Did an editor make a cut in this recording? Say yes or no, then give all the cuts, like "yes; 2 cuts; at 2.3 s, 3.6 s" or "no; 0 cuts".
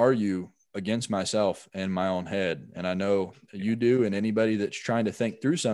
no; 0 cuts